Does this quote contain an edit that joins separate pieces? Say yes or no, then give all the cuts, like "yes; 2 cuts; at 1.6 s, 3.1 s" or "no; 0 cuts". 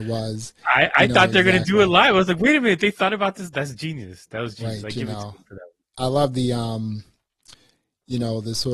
no; 0 cuts